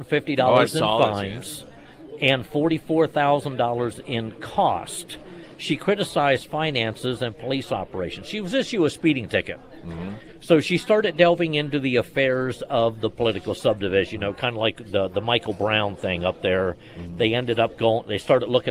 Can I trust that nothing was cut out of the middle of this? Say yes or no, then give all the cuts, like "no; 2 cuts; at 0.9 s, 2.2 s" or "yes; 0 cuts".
yes; 0 cuts